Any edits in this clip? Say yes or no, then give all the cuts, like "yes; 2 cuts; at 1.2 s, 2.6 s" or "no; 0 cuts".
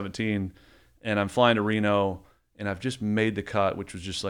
no; 0 cuts